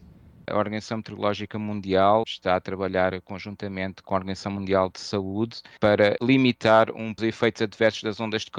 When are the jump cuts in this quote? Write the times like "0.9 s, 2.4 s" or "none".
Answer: 2.2 s